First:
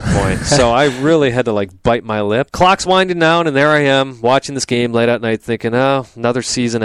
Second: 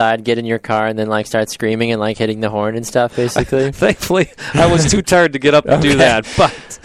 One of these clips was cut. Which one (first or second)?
first